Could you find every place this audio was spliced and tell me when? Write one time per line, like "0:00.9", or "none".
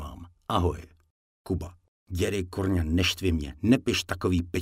none